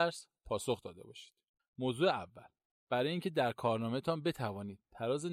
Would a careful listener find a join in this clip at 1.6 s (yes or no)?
yes